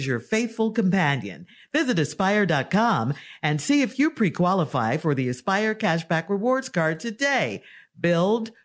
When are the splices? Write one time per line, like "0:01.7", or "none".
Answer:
none